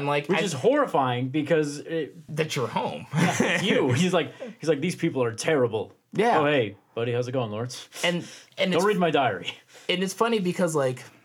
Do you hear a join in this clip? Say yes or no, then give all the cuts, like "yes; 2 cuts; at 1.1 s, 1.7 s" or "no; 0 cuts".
yes; 1 cut; at 2.3 s